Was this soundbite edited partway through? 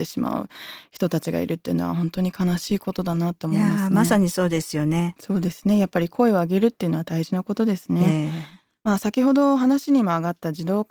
yes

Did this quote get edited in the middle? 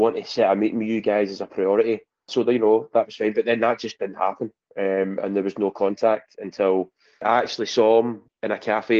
yes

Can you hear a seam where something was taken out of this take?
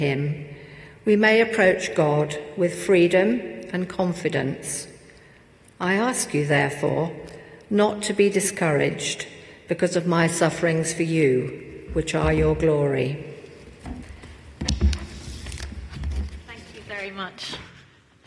no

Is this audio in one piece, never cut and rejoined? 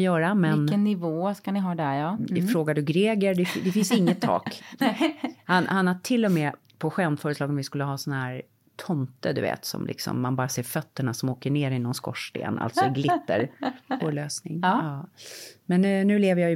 no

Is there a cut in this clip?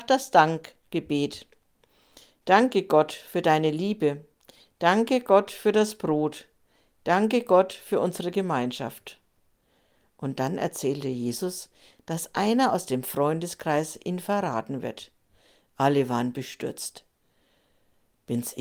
no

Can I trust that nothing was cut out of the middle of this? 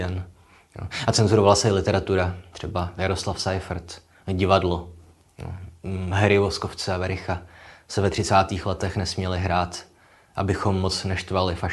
yes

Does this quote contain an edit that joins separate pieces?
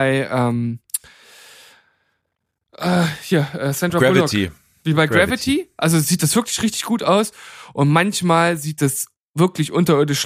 no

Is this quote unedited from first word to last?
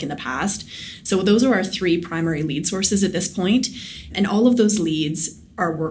yes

